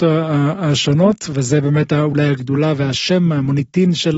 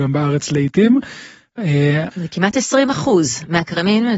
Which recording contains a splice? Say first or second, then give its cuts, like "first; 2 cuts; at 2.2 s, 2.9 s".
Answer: second; 1 cut; at 2.1 s